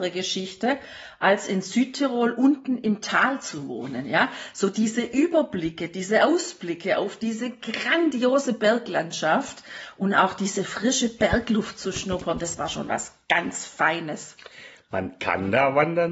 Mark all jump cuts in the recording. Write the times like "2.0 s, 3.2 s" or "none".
none